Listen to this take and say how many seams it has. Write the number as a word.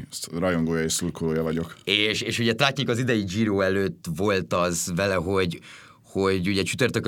one